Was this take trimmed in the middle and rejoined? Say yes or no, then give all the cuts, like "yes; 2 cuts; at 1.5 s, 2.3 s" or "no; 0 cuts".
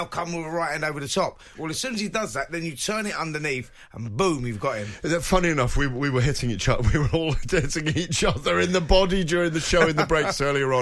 yes; 1 cut; at 1.5 s